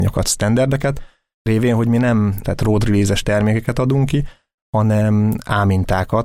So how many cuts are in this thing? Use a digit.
1